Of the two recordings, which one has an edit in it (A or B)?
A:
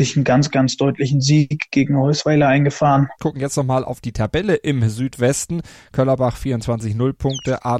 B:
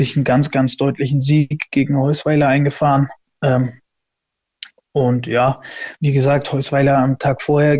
A